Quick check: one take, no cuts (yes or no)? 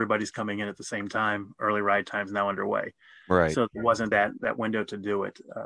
yes